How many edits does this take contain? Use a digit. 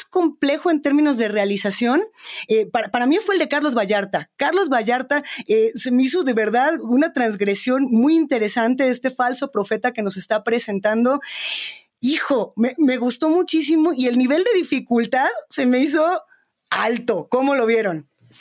0